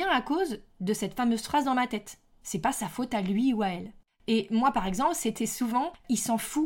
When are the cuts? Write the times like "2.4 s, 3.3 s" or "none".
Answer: none